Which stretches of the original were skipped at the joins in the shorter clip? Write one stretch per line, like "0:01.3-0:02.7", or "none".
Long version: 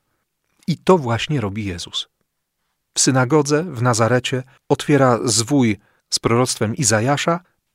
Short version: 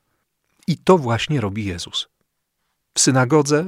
none